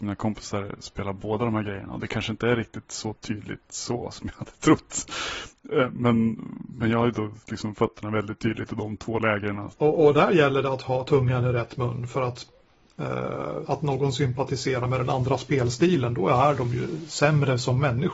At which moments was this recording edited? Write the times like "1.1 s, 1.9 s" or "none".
9.7 s, 13.6 s

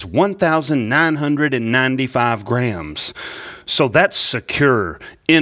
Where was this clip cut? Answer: none

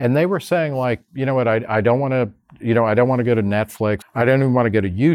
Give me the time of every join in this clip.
4.0 s

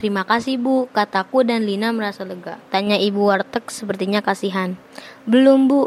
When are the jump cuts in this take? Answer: 2.7 s

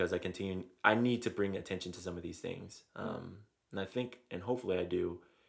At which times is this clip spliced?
none

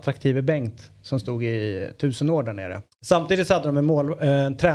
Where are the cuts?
2.9 s

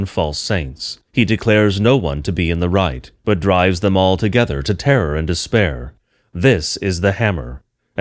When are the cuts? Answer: 1.1 s, 3.2 s

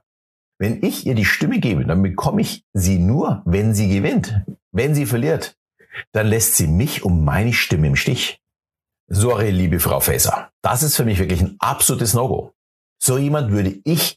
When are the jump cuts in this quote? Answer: none

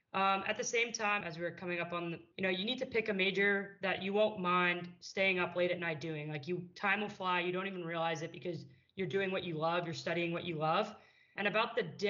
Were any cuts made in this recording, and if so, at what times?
1.2 s, 2.3 s

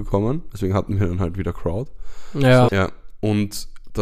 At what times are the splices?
2.7 s

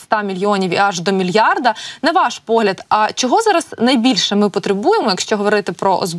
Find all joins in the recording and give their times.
none

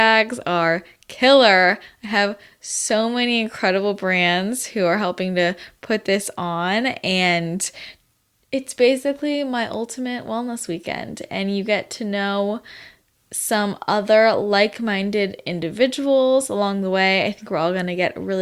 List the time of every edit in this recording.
none

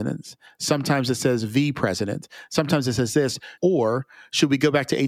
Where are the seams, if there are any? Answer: 3.6 s

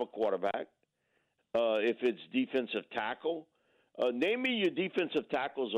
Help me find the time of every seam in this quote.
1.4 s

